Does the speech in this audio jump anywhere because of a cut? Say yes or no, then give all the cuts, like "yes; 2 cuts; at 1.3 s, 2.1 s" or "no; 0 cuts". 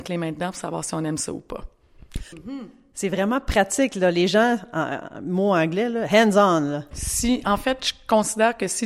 yes; 2 cuts; at 2.3 s, 6.9 s